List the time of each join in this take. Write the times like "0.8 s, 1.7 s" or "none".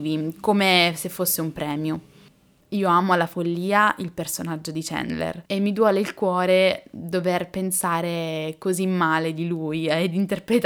2.6 s, 5.5 s